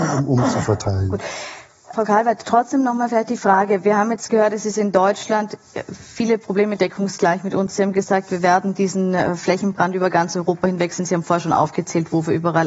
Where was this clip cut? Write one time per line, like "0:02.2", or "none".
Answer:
0:01.9